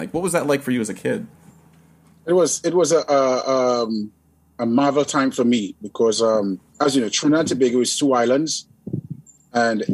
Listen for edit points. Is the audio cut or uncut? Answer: cut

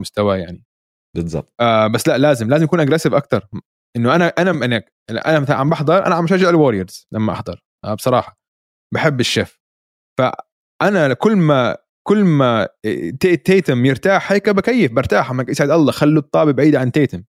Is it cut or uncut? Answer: uncut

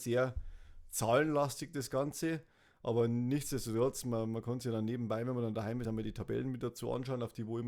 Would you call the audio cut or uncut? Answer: uncut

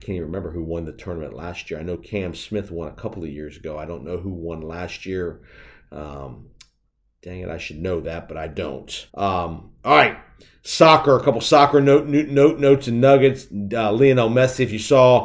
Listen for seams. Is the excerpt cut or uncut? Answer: cut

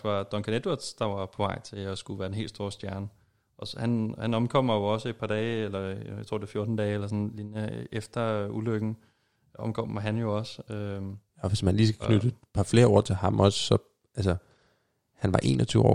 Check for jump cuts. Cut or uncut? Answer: uncut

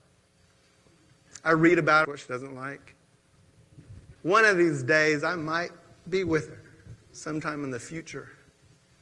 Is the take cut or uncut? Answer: cut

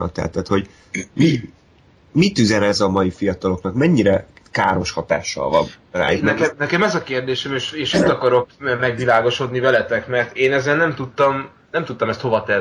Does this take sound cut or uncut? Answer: uncut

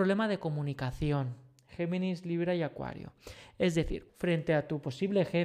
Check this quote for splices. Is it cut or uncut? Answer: cut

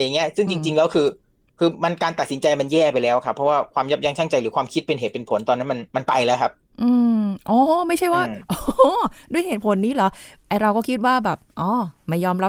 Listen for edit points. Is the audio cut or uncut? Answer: cut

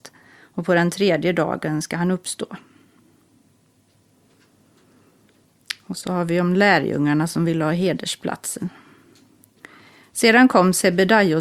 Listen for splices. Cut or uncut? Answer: uncut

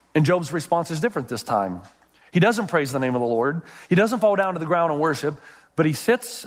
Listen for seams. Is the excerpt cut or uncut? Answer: uncut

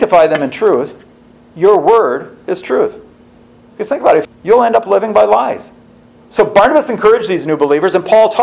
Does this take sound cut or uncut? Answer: cut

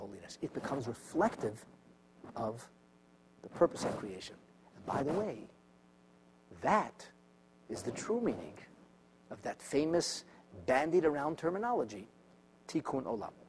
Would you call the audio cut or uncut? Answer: uncut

